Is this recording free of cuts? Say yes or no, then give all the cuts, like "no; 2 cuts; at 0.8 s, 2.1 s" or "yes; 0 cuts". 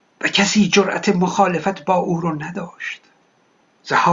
yes; 0 cuts